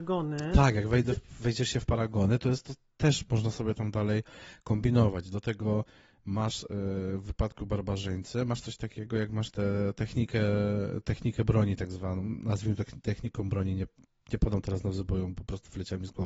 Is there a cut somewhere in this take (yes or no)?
no